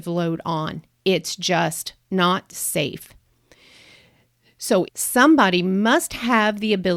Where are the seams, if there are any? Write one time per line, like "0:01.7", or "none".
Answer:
0:04.9